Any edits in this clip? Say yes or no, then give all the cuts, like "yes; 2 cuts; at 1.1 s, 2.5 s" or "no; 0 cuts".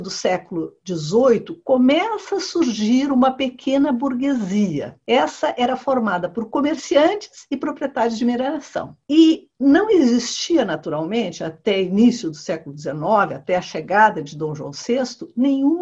no; 0 cuts